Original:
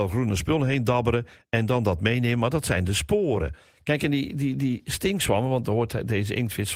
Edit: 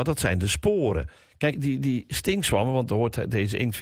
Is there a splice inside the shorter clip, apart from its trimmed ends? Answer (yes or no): yes